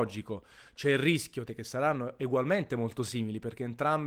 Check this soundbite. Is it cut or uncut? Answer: cut